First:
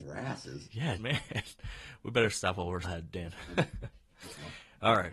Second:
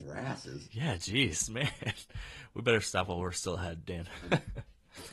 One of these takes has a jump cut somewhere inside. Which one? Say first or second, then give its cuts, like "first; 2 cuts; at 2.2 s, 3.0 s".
first; 2 cuts; at 1.0 s, 2.8 s